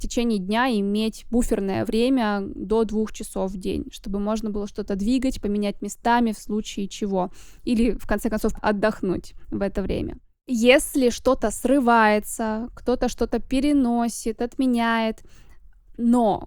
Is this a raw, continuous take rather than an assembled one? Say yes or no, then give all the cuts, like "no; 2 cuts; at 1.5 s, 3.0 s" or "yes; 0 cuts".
no; 1 cut; at 8.6 s